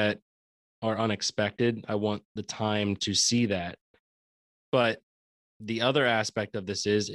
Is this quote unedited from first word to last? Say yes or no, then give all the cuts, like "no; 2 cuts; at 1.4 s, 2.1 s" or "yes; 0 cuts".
no; 1 cut; at 4.6 s